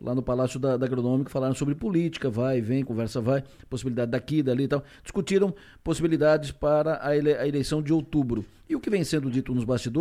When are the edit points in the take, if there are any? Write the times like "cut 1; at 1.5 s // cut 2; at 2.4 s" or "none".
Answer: none